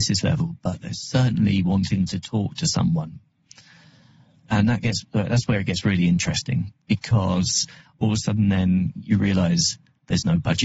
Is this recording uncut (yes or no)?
yes